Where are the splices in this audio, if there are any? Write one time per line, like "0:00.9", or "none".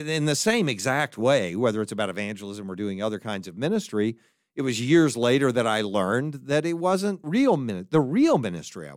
0:07.2